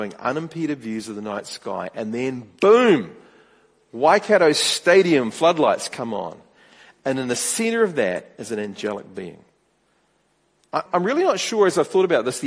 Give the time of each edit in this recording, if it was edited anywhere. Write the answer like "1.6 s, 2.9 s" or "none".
10.9 s

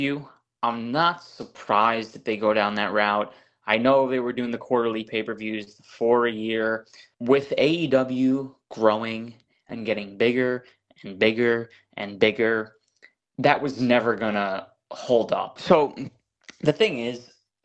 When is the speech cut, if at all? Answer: 7.1 s, 15.6 s

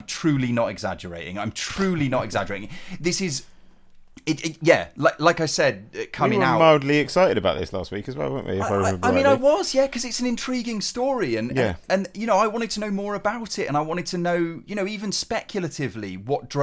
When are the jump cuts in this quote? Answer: none

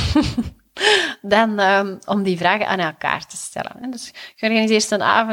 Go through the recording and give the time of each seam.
none

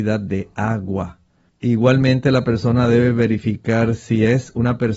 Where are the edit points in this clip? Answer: 1.5 s

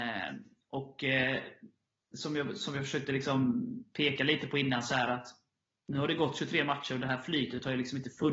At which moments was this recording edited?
none

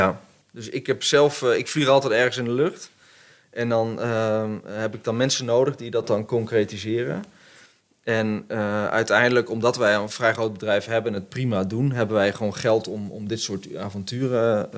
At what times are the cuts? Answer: none

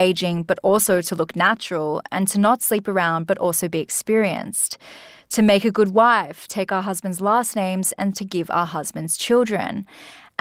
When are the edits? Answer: none

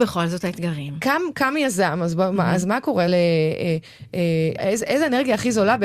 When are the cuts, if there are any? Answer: 3.1 s, 4.6 s

